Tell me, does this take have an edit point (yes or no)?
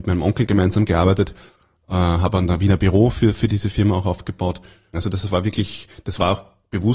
yes